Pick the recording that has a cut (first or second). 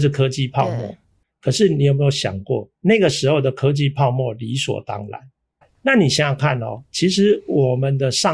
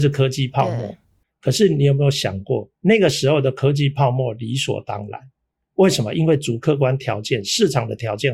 first